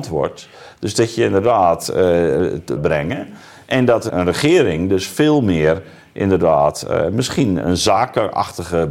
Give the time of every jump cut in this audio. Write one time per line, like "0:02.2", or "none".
0:02.8
0:04.1
0:07.6